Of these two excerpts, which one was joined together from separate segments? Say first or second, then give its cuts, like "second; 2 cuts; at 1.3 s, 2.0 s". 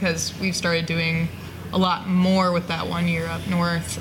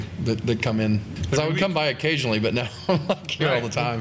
second; 1 cut; at 1.2 s